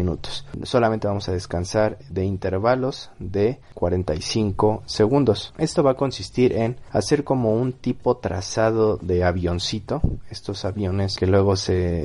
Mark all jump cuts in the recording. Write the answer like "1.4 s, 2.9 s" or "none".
5.6 s